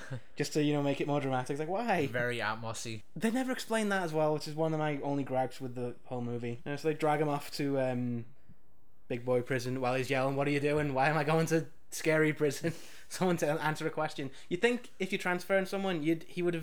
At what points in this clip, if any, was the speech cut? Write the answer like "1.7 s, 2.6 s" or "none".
6.6 s

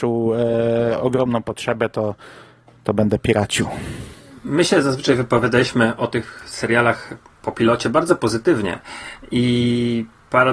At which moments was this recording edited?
none

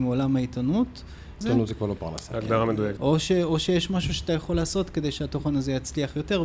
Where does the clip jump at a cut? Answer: 1.4 s, 3.0 s

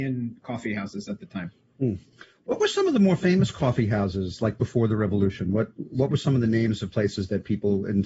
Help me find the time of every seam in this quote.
none

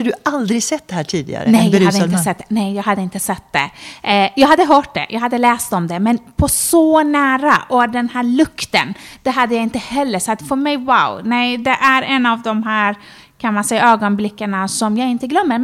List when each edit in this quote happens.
none

